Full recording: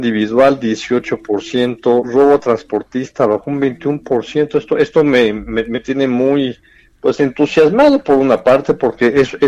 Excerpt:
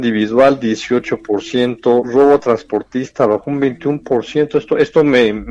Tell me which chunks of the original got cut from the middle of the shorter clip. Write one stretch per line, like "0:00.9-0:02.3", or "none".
none

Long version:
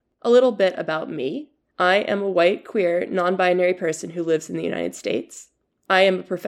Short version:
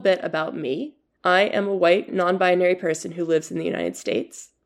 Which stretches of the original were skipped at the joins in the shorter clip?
0:02.6-0:03.1

